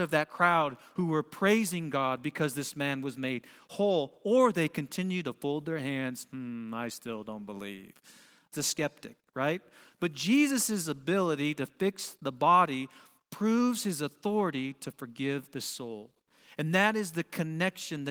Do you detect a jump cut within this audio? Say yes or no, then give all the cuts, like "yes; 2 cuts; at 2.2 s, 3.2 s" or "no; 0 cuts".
yes; 1 cut; at 8.5 s